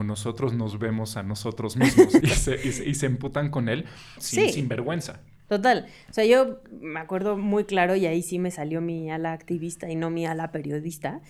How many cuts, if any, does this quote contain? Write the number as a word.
two